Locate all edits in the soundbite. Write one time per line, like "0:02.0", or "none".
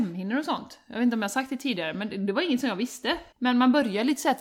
0:03.3